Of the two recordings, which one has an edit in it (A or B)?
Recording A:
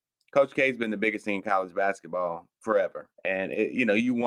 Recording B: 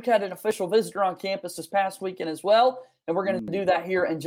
A